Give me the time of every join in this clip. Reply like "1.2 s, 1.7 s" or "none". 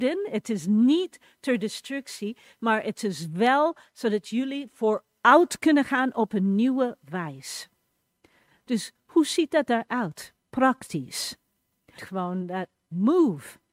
12.0 s